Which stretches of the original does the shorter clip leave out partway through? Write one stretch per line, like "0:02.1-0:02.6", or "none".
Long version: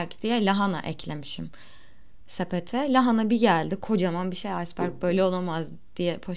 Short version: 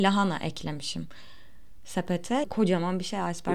0:02.9-0:03.8